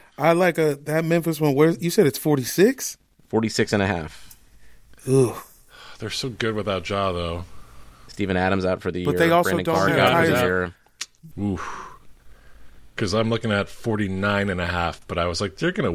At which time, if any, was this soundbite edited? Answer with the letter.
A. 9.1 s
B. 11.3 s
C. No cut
B